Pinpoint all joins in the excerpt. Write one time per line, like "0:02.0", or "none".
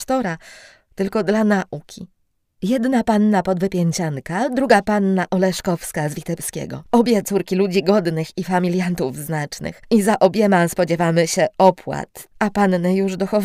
0:12.3